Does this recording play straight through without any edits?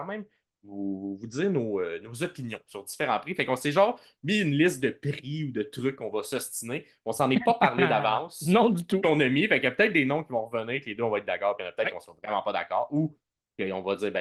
yes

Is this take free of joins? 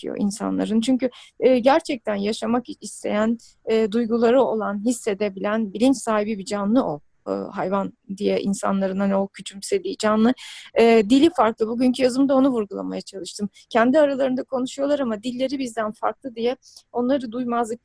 yes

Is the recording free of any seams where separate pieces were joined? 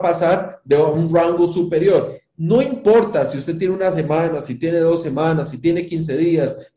yes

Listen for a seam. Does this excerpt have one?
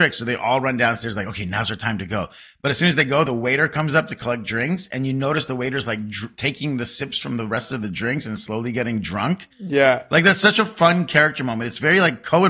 no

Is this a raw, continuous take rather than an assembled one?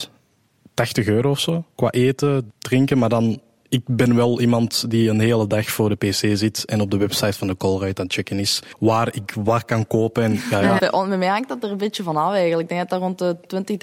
no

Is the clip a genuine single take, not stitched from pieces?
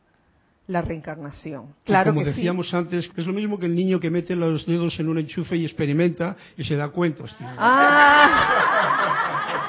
no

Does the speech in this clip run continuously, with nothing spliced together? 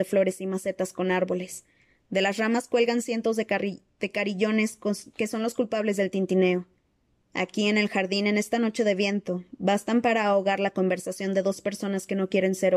yes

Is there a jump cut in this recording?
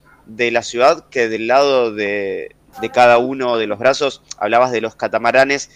yes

